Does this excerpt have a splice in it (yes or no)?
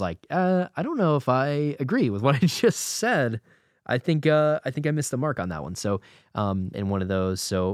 yes